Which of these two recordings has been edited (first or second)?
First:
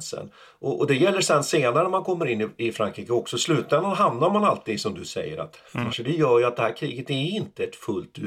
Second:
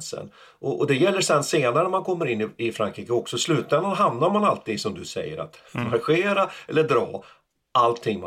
first